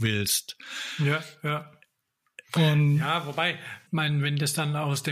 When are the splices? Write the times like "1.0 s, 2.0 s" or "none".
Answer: 2.5 s, 3.9 s